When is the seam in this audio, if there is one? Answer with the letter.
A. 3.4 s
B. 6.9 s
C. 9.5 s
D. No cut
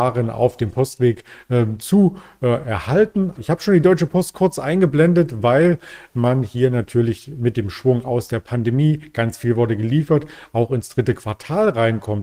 A